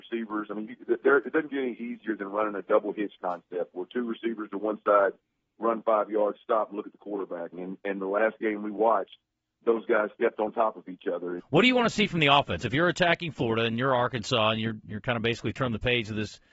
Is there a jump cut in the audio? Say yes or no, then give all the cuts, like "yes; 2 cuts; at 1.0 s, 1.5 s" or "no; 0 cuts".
yes; 2 cuts; at 7.5 s, 11.4 s